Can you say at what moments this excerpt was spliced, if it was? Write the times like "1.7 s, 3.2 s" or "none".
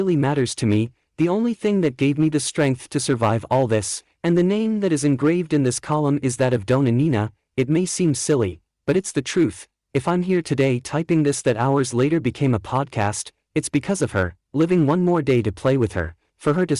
none